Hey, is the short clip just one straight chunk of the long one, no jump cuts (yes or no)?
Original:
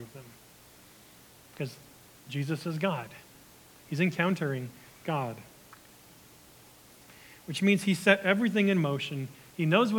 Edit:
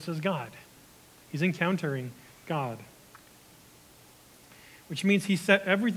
yes